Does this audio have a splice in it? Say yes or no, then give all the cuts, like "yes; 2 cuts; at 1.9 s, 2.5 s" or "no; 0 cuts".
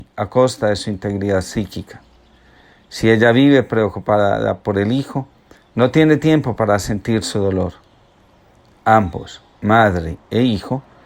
no; 0 cuts